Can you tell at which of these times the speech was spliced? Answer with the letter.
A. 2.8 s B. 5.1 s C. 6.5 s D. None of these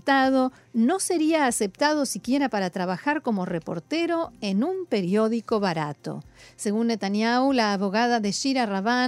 D